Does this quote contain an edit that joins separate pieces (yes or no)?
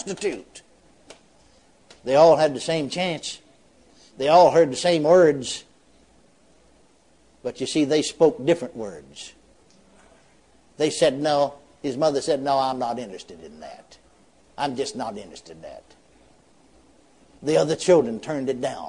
no